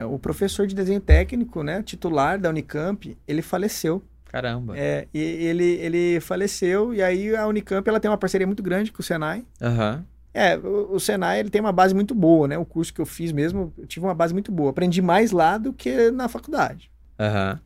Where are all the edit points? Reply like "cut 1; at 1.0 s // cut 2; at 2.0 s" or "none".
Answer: cut 1; at 4.2 s // cut 2; at 10.3 s